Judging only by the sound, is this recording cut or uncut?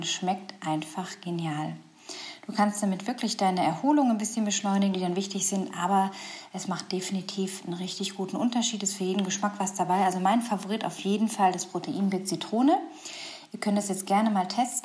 cut